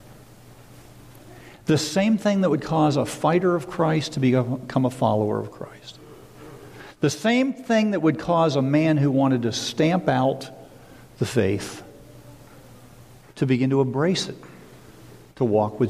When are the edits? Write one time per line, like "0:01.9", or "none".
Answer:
none